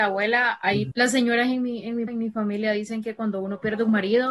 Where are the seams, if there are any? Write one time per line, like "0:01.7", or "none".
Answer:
0:00.9
0:02.1